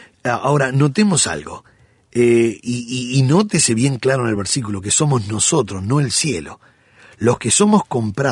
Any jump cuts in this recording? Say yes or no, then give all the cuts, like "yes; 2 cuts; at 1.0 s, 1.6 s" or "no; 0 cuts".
no; 0 cuts